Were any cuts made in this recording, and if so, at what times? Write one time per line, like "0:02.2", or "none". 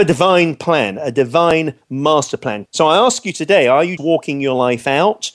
0:02.7
0:04.0